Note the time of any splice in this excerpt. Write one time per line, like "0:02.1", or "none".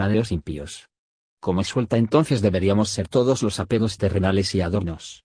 0:01.2